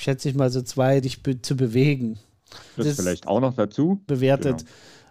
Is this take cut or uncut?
cut